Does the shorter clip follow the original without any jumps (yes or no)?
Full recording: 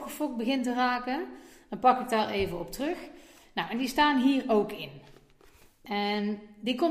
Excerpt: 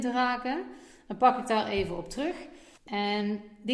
no